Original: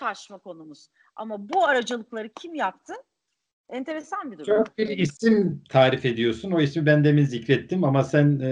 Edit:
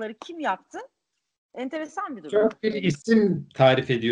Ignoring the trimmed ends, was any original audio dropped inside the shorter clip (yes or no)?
no